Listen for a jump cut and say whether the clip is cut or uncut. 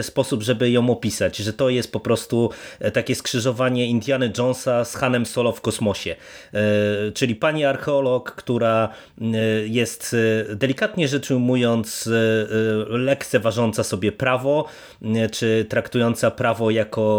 uncut